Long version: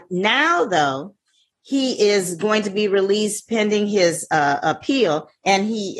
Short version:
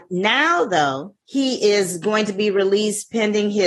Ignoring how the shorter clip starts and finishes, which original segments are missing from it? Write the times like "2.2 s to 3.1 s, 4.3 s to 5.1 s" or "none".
1.2 s to 1.6 s